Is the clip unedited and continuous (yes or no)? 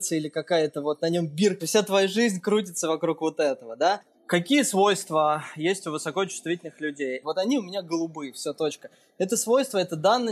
no